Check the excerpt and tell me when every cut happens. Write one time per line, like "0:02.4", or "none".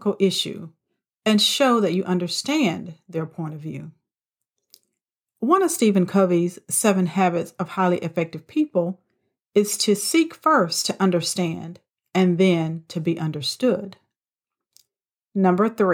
none